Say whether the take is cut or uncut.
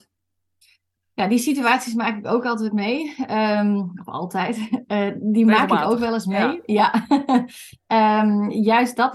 uncut